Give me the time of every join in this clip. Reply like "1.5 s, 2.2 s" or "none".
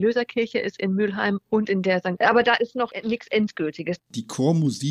2.2 s, 4.0 s